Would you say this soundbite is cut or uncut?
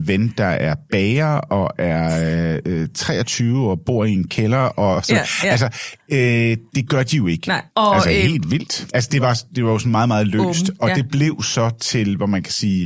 cut